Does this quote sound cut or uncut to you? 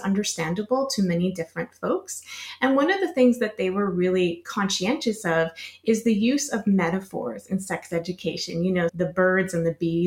cut